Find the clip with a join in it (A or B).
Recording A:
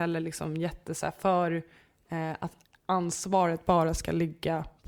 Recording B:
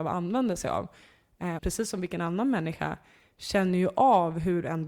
B